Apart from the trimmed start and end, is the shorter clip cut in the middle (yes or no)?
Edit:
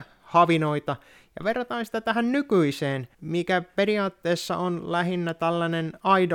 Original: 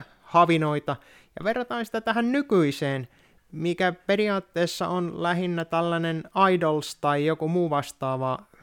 yes